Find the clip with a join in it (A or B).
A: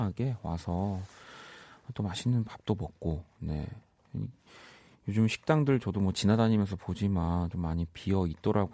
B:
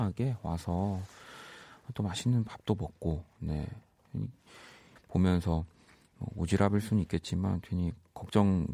B